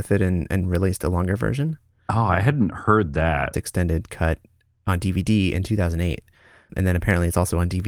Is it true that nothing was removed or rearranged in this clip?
no; 2 cuts; at 3.5 s, 6.7 s

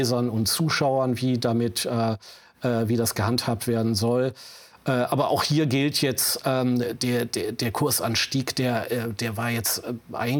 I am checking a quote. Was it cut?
no; 0 cuts

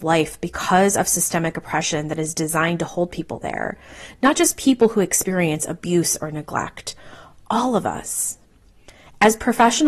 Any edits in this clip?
no; 0 cuts

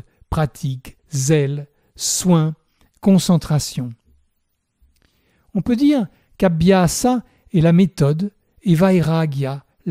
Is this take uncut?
yes; 0 cuts

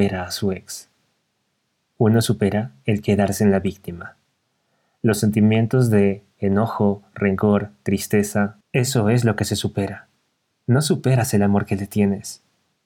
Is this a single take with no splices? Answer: no; 2 cuts; at 8.6 s, 10.5 s

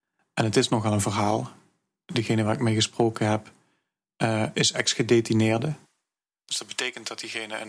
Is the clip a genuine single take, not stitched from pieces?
yes; 0 cuts

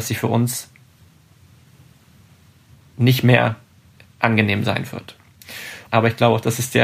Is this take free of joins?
no; 1 cut; at 5.9 s

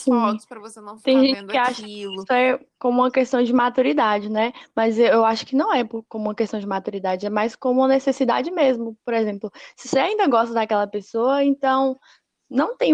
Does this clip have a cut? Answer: no; 0 cuts

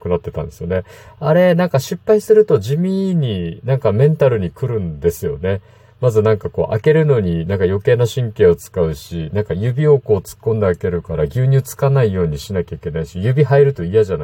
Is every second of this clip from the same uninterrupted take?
yes; 0 cuts

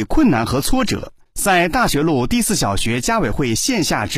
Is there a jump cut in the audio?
yes; 1 cut; at 1.2 s

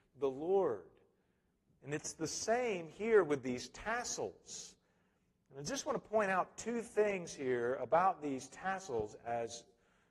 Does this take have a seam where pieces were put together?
no; 0 cuts

